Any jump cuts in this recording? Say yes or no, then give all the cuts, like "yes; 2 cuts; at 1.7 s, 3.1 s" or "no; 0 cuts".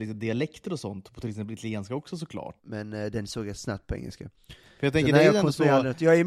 yes; 1 cut; at 2.6 s